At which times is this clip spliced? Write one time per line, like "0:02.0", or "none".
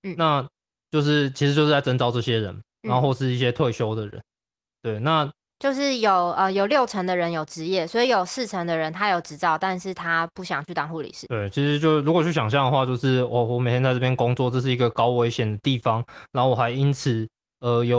0:05.5
0:11.3